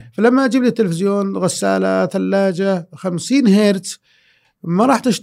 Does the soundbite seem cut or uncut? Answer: uncut